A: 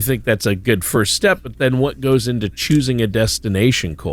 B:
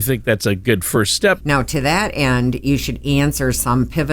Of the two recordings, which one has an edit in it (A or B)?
B